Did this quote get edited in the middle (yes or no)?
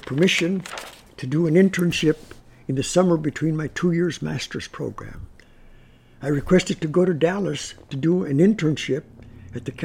no